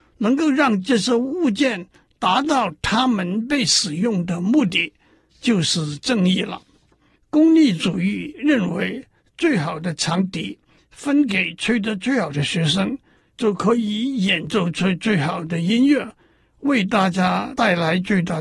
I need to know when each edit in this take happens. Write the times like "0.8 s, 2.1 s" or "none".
7.2 s